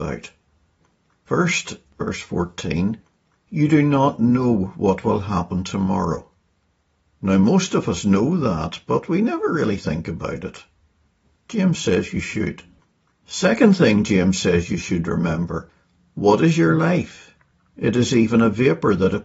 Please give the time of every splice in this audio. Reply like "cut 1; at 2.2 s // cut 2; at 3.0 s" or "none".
none